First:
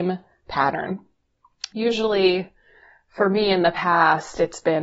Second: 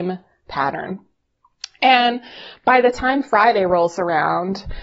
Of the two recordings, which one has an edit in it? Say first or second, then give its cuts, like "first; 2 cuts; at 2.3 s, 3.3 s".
first; 1 cut; at 1.7 s